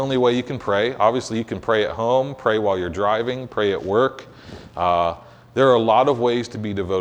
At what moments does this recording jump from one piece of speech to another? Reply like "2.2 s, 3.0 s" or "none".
none

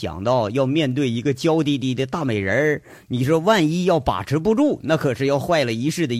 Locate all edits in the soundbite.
none

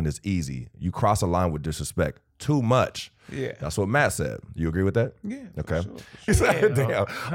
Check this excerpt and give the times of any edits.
6.3 s

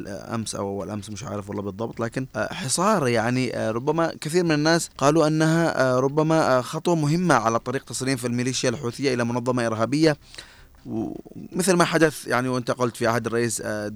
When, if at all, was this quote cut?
2.3 s, 4.9 s

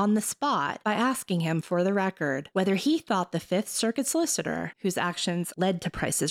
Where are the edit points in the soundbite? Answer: none

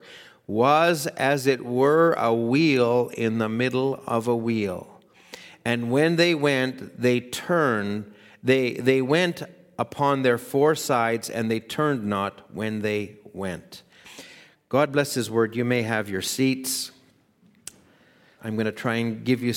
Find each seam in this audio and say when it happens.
18.4 s

